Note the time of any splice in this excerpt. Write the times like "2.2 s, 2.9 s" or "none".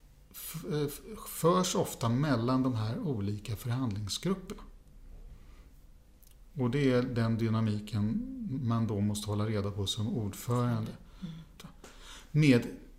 11.6 s